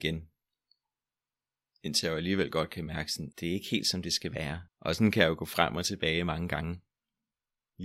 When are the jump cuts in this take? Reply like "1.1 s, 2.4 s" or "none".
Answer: 3.3 s, 4.7 s